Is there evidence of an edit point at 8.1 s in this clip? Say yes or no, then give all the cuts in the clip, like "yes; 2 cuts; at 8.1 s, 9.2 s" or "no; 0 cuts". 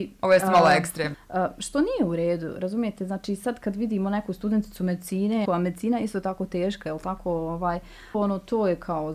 yes; 3 cuts; at 1.1 s, 5.4 s, 8.1 s